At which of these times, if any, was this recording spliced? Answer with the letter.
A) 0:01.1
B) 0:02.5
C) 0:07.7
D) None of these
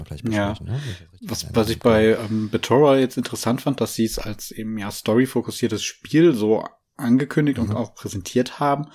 D